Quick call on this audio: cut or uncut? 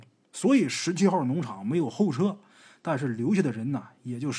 uncut